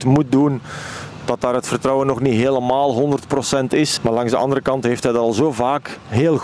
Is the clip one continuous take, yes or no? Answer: no